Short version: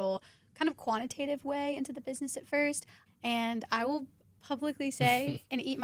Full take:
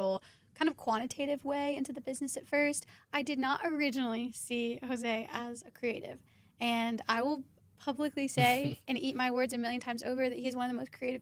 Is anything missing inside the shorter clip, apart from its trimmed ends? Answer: yes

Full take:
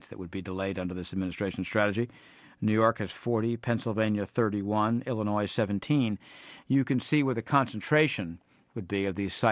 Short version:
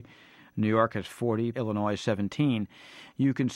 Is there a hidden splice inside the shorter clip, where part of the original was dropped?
yes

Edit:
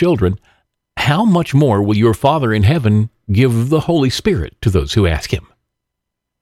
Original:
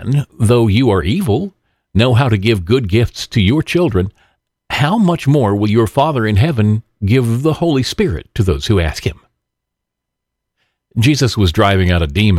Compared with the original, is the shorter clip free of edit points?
yes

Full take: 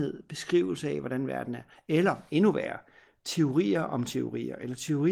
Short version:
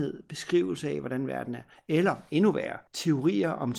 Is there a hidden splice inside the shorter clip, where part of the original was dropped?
yes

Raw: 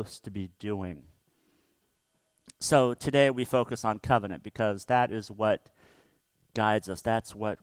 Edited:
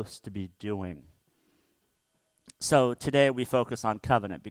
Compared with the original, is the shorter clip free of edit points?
yes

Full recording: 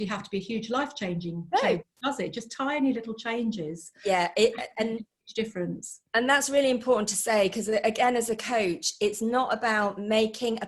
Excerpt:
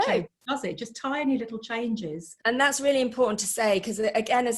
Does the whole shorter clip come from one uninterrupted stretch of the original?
no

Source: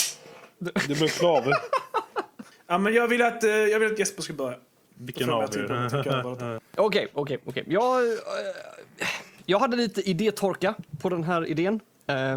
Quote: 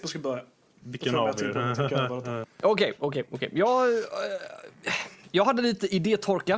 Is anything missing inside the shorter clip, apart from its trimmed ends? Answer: no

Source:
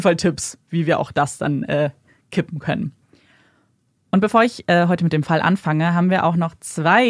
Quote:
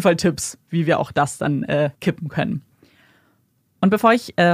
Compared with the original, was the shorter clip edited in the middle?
yes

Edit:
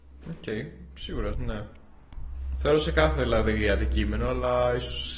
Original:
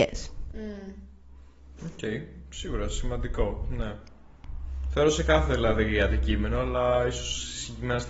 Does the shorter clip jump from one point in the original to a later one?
yes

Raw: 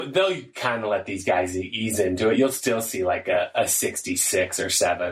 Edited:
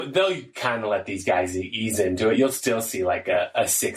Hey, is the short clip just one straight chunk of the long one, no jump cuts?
yes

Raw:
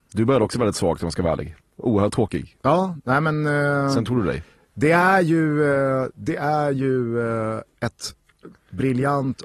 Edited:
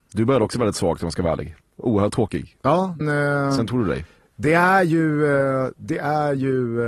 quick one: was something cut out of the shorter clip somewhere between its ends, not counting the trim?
yes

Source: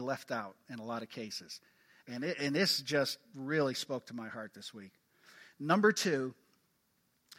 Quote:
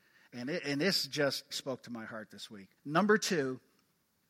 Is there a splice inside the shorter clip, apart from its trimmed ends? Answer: yes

